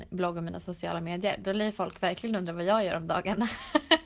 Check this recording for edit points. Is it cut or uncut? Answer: uncut